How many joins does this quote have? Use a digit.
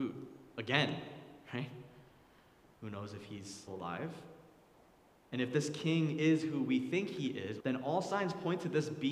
3